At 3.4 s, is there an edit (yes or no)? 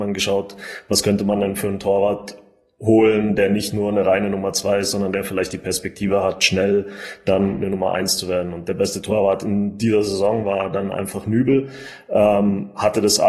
no